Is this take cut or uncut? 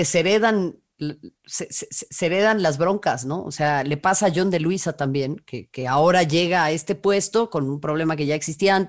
uncut